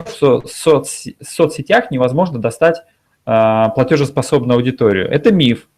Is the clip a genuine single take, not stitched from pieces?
yes; 0 cuts

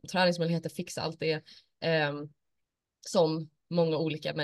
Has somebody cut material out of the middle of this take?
no; 0 cuts

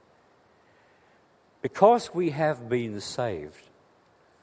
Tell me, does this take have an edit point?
no; 0 cuts

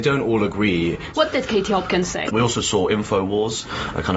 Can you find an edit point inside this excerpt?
yes; 2 cuts; at 1.1 s, 2.3 s

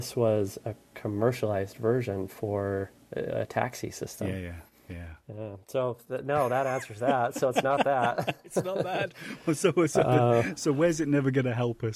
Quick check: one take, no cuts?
yes; 0 cuts

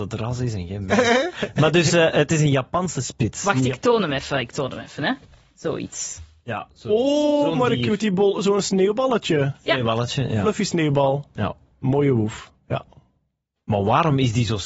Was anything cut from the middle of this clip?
no; 0 cuts

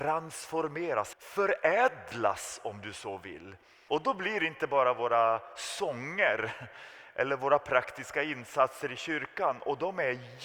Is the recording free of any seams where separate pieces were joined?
no; 2 cuts; at 1.1 s, 3.9 s

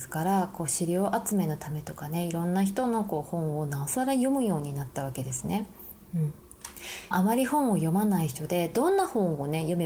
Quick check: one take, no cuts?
no; 1 cut; at 7.1 s

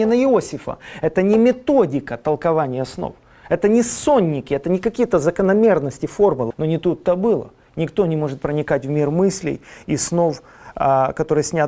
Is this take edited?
yes; 1 cut; at 6.5 s

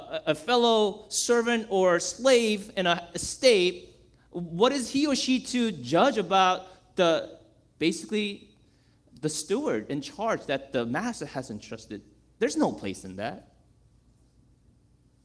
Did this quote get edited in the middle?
no; 0 cuts

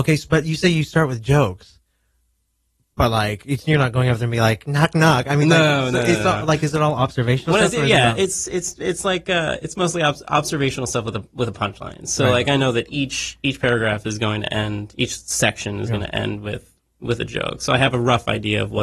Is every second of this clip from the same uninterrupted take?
yes; 0 cuts

